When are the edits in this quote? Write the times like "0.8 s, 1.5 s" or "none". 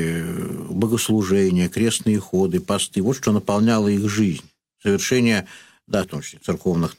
6.0 s